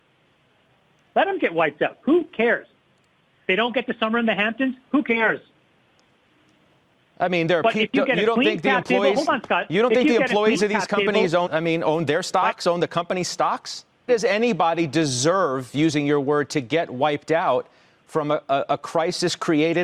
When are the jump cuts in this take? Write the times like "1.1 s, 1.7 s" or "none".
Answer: 11.5 s, 14.1 s